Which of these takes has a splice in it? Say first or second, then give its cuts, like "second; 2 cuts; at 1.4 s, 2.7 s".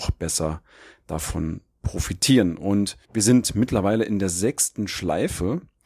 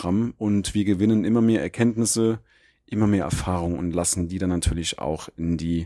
first; 1 cut; at 3.0 s